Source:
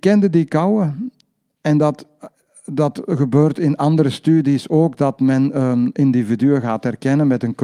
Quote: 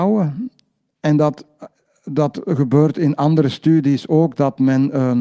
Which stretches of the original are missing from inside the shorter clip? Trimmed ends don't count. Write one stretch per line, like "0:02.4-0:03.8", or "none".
none